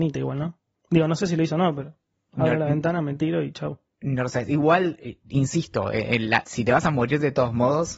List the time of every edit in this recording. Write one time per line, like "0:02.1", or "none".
0:06.4